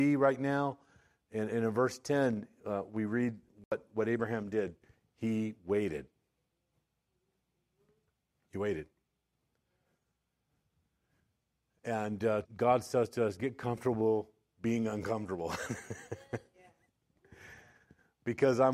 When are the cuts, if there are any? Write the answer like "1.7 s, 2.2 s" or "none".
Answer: 12.4 s